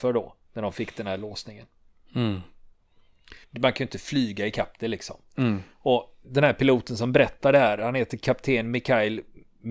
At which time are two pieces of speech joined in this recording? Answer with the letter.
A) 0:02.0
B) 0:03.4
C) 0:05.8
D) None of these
B